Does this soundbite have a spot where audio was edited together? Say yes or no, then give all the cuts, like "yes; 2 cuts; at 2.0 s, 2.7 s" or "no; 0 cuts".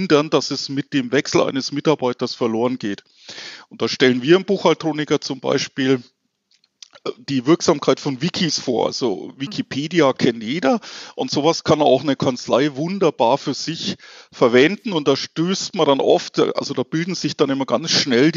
no; 0 cuts